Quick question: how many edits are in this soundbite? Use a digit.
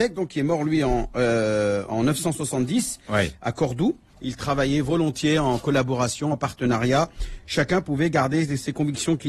2